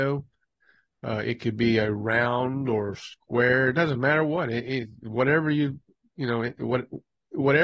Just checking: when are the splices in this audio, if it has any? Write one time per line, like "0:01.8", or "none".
none